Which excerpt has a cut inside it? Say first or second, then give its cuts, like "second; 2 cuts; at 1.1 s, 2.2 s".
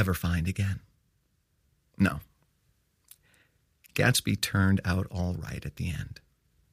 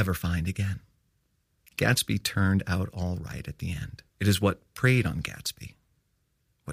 second; 2 cuts; at 1.7 s, 4.1 s